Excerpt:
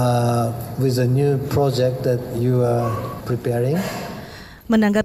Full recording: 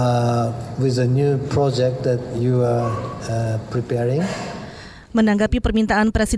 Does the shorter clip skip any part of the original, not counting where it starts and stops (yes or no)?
yes